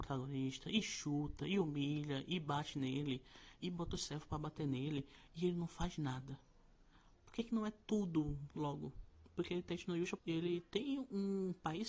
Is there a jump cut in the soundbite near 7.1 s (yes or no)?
yes